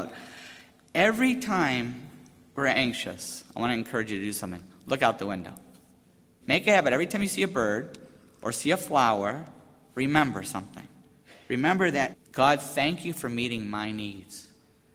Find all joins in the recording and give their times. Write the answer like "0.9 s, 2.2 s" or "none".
6.4 s, 12.1 s